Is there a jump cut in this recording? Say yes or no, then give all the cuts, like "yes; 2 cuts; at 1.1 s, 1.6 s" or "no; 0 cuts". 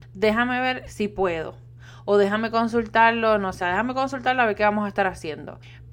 yes; 1 cut; at 3.6 s